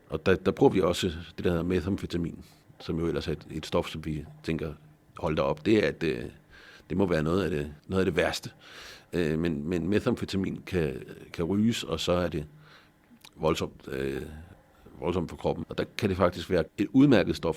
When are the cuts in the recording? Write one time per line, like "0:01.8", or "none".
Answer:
0:07.8
0:15.6
0:16.7